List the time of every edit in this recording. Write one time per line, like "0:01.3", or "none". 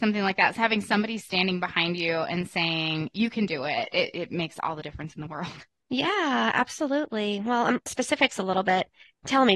0:07.9

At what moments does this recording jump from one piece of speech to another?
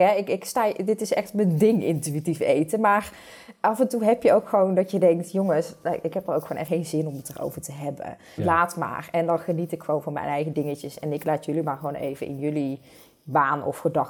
0:06.6
0:08.4

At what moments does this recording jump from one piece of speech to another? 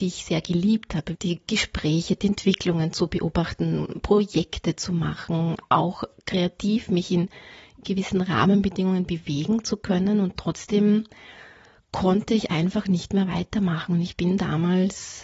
0:01.1

